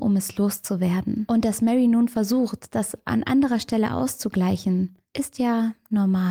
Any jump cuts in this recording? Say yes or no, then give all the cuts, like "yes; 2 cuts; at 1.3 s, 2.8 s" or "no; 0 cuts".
no; 0 cuts